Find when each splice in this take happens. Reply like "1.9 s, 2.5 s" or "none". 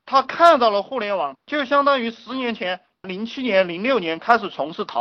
1.3 s

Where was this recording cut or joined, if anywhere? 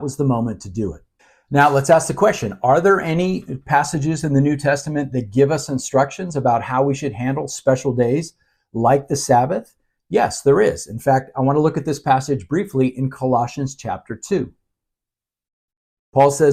none

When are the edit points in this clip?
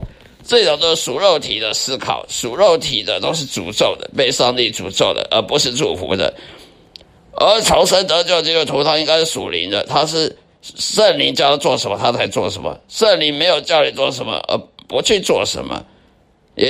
none

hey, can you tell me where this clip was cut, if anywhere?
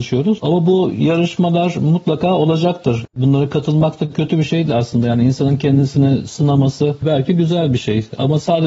4.7 s

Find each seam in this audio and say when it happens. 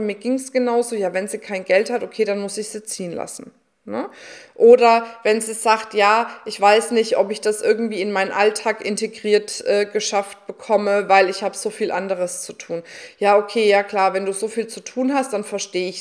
none

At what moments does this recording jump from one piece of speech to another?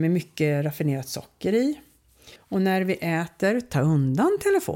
2.4 s

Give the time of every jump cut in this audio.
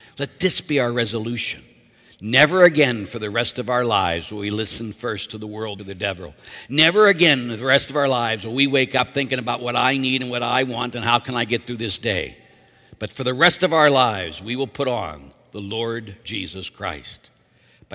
5.8 s

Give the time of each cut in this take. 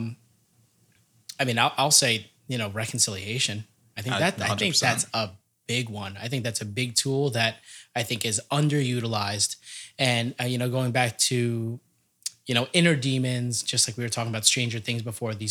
none

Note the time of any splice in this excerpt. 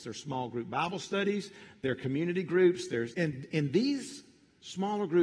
3.1 s

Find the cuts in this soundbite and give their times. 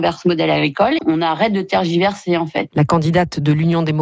1.0 s

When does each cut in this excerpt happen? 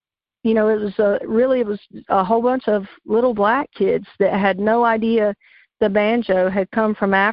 none

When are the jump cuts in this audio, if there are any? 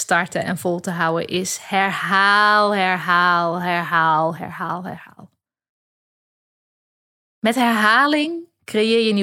4.4 s

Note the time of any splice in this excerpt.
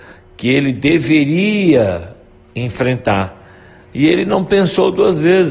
none

